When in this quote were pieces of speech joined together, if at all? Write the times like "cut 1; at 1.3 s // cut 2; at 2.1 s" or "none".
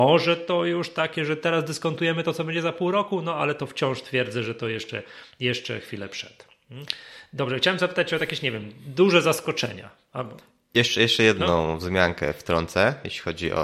none